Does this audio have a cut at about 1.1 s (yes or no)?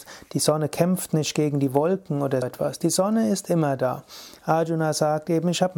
no